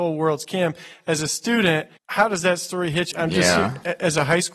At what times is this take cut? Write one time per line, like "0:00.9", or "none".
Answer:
0:02.0
0:03.1

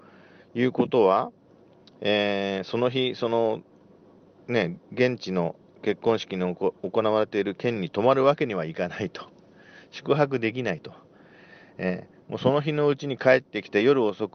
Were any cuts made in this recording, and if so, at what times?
none

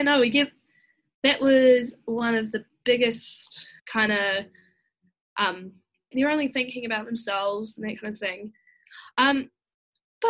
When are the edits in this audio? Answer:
0:03.8
0:06.1

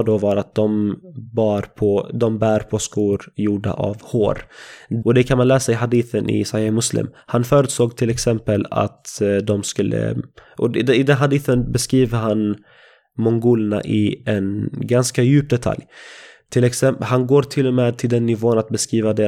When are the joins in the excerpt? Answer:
0:05.0

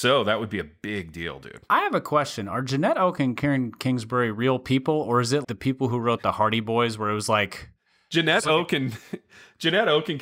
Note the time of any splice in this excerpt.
0:05.4

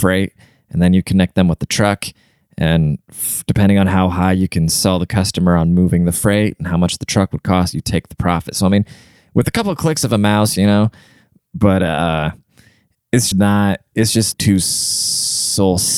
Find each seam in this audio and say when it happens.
0:10.6
0:13.3
0:14.3

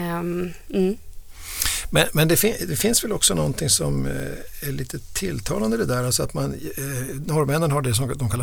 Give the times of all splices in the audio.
none

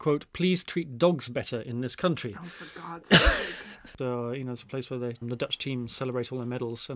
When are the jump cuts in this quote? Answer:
0:04.0
0:05.2

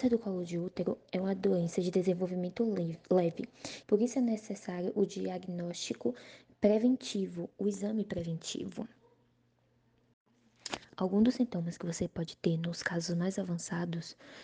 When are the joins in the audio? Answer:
0:03.8

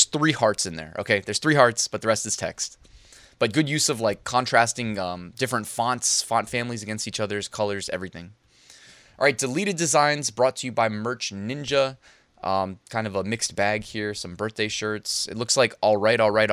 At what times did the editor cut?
none

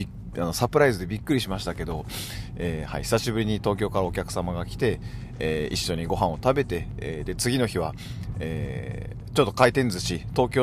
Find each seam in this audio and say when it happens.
none

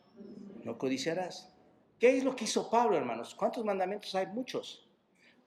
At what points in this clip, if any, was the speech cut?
0:01.8

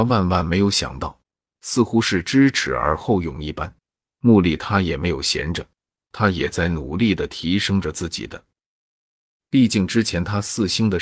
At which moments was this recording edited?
0:04.1
0:09.4

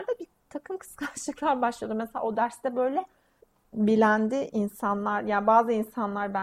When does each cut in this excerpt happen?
none

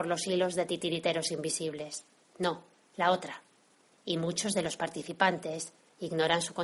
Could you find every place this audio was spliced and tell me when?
0:02.2
0:03.9

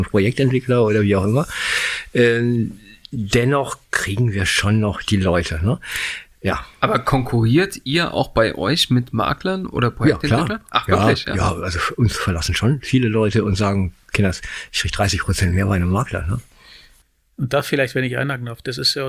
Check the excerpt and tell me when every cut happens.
none

